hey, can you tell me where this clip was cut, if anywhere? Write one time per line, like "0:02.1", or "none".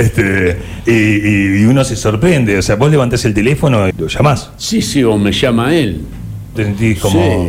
0:03.9
0:06.5